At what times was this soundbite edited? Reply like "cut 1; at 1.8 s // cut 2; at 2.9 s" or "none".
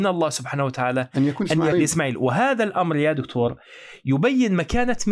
cut 1; at 1.7 s